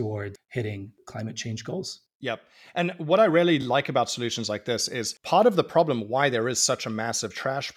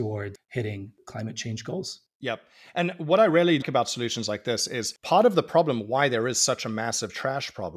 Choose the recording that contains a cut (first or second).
second